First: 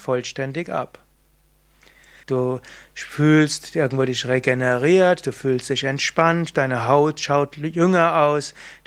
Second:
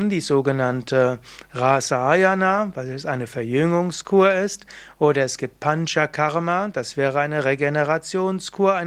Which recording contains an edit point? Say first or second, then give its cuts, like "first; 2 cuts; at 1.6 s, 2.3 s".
first; 1 cut; at 2.2 s